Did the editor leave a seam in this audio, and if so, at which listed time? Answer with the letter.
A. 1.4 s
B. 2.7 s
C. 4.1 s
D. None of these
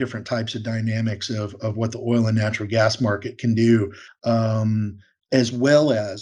C